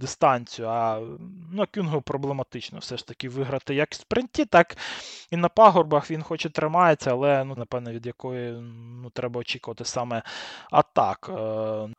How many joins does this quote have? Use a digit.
1